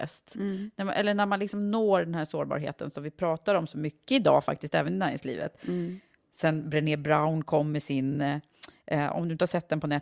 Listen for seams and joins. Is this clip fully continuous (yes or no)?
yes